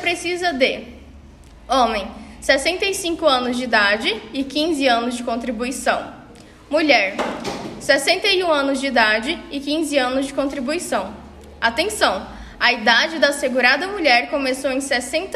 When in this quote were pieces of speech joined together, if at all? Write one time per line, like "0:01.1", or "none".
none

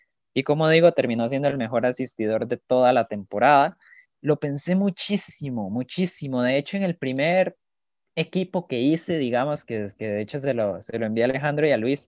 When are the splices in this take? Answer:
0:04.1

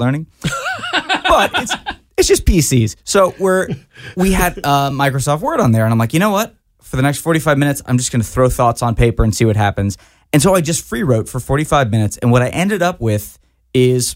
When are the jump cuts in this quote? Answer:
none

